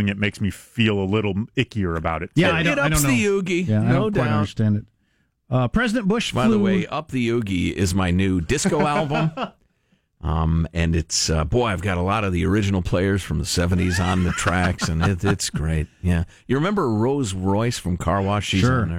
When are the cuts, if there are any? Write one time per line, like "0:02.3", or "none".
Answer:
none